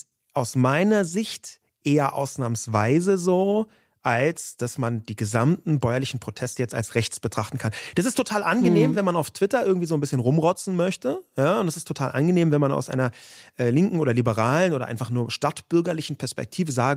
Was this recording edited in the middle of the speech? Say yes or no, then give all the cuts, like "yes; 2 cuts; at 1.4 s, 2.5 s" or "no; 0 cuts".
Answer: no; 0 cuts